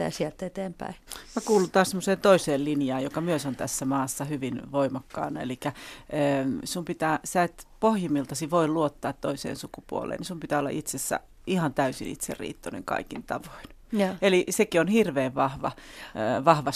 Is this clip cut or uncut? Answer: cut